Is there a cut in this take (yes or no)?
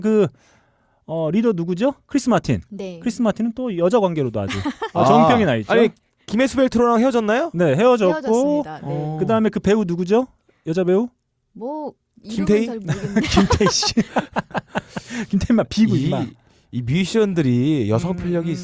no